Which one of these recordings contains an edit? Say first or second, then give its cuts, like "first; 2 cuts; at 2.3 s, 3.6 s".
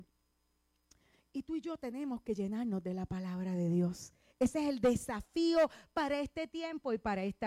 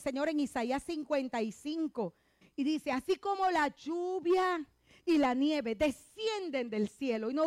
second; 1 cut; at 2.4 s